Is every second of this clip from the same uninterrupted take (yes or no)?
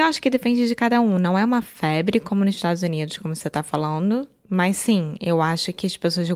yes